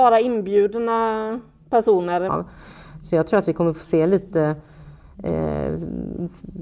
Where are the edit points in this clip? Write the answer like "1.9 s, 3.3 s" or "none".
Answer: 2.3 s